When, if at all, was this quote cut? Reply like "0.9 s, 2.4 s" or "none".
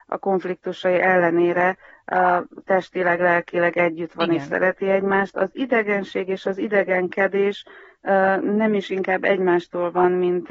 none